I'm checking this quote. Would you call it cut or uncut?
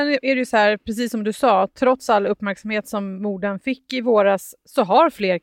uncut